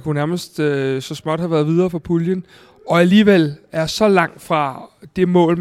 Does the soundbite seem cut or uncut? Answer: uncut